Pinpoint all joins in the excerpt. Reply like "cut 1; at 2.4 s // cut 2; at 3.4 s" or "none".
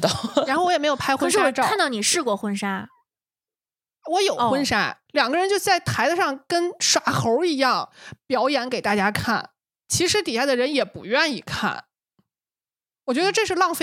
cut 1; at 5.1 s

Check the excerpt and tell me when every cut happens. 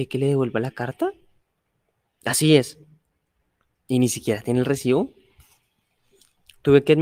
none

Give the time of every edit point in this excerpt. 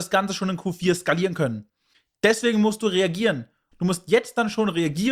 cut 1; at 3.7 s

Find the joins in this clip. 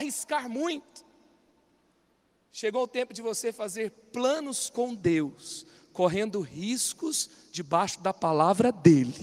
none

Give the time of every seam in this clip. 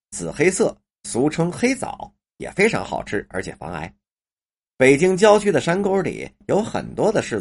none

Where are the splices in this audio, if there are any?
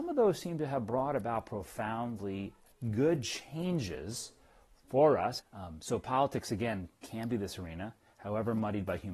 cut 1; at 5.4 s

